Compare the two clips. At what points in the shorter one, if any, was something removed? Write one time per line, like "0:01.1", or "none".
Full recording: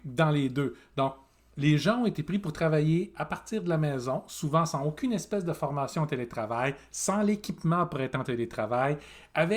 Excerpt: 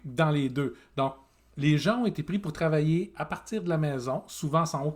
none

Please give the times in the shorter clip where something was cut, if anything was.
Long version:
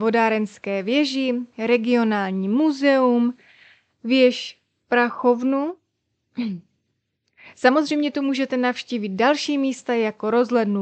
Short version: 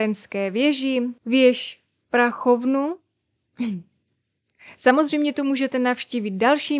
0:01.2

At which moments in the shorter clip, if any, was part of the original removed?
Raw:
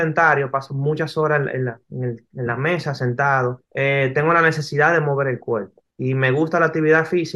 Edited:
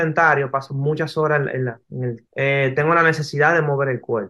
0:02.3

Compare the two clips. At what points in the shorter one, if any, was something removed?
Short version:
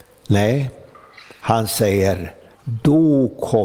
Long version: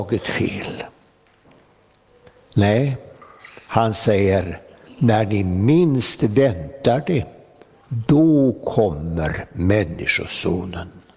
0:02.5

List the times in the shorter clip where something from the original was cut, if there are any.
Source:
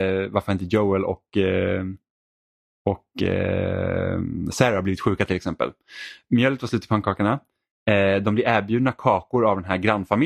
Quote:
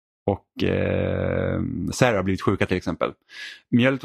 none

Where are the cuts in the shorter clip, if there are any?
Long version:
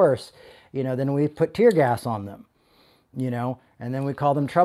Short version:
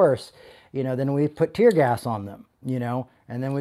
0:02.5

